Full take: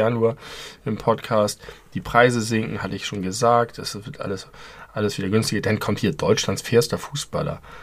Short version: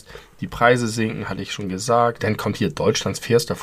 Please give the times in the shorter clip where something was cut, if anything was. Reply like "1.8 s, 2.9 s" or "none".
2.2 s

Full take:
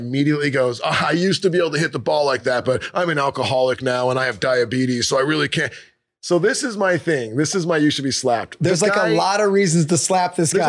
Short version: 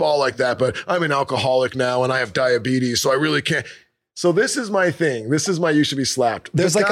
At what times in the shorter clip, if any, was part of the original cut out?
none

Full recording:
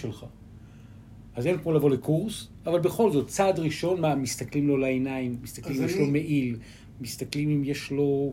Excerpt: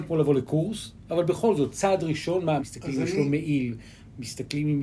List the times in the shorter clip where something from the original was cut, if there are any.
2.6 s

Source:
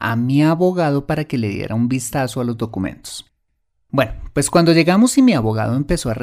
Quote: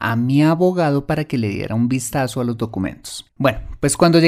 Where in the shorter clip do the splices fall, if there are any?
3.3 s

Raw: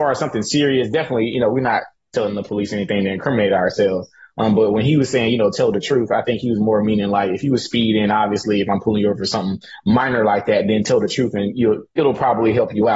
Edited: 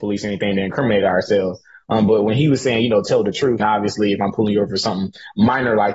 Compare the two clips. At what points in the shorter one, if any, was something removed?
3.6 s

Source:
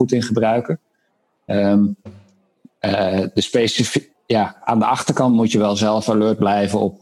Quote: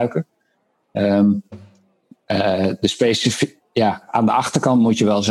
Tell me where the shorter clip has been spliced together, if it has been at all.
none

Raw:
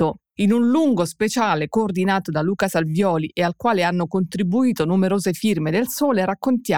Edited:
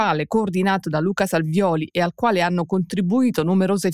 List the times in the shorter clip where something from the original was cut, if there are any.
none

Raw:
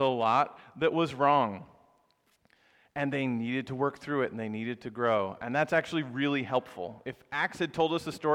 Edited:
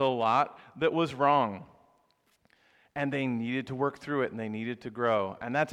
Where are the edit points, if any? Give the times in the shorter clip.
none

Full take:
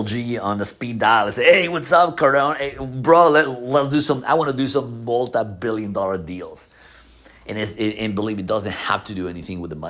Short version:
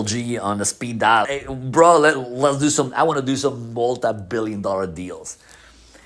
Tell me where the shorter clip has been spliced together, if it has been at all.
1.2 s

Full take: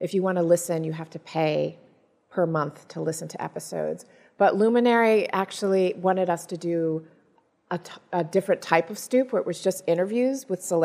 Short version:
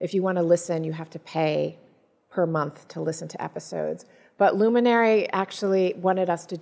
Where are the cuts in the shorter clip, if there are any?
none

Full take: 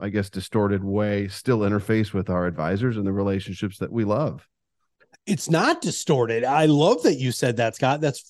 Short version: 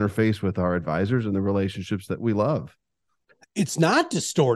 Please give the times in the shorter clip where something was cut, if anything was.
none

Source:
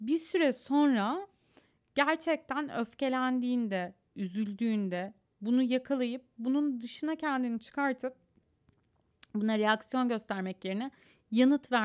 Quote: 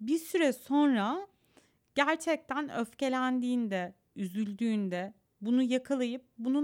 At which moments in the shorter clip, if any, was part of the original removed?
none

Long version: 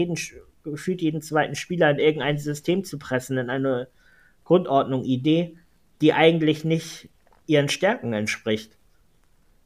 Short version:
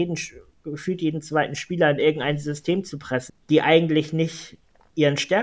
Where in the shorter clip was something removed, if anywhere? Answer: 3.3 s

